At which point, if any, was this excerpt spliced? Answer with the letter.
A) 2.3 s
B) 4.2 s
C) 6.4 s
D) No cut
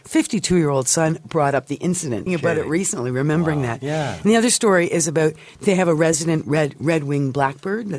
A